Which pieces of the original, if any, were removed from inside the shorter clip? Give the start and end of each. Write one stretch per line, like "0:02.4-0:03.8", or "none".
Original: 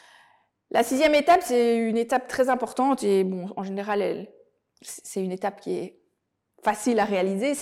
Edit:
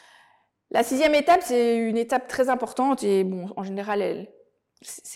none